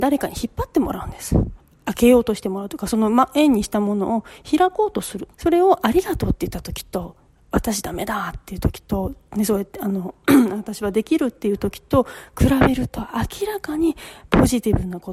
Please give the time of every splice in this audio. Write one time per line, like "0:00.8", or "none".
0:05.3